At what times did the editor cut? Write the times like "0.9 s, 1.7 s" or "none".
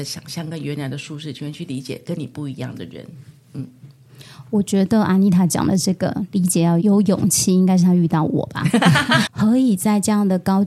6.8 s, 9.3 s